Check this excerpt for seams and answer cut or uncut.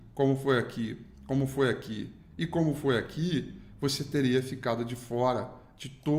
uncut